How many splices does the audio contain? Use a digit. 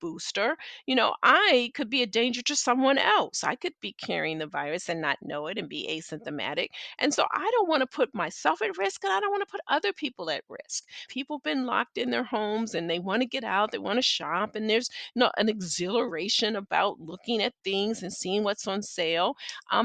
1